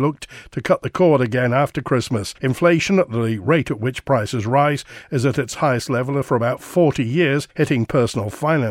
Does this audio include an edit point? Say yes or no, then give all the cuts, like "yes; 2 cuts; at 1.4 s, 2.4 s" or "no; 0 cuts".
no; 0 cuts